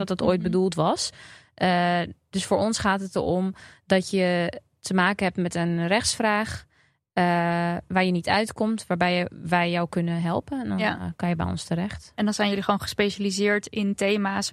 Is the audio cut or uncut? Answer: uncut